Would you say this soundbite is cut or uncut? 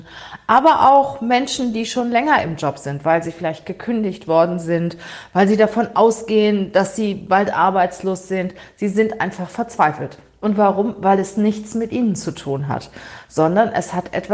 uncut